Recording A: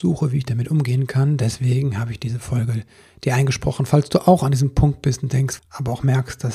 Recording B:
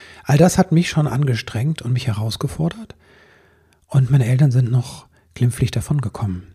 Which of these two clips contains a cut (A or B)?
A